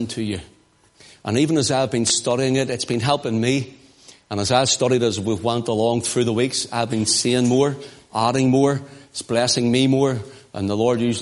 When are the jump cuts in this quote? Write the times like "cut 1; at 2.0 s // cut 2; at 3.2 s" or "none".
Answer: none